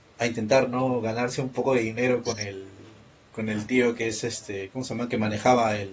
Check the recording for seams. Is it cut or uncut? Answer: uncut